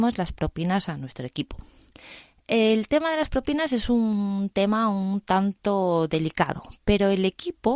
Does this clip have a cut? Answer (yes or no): no